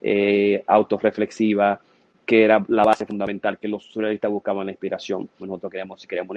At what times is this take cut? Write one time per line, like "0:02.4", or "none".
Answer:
0:05.4